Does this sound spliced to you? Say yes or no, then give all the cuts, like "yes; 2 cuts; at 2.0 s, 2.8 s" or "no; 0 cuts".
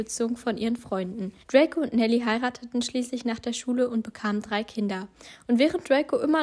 yes; 1 cut; at 1.4 s